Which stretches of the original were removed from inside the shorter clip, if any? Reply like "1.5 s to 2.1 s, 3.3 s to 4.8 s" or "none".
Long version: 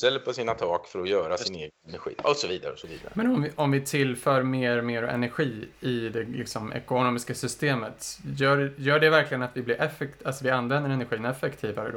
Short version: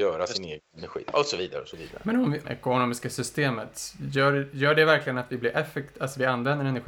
3.5 s to 6.7 s